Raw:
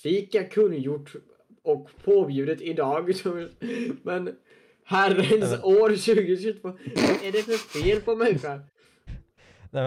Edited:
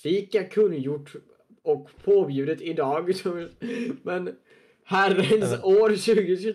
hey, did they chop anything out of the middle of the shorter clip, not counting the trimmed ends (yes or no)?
no